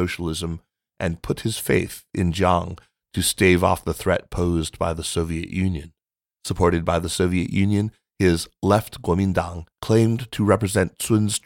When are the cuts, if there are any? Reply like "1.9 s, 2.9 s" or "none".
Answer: 6.2 s, 9.7 s